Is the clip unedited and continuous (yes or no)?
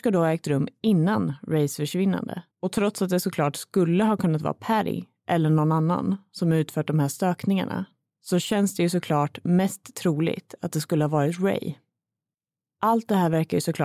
no